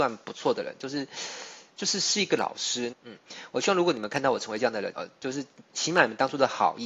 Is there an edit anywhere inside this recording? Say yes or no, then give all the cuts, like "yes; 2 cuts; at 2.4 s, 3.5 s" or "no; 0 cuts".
yes; 2 cuts; at 2.9 s, 4.9 s